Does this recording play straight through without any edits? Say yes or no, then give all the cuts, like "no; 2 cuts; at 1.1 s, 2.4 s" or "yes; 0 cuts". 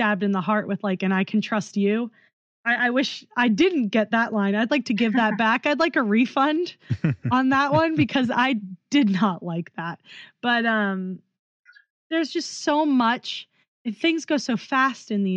yes; 0 cuts